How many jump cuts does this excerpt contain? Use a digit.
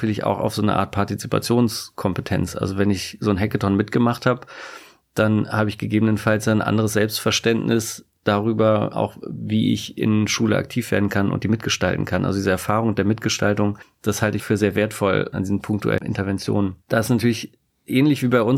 1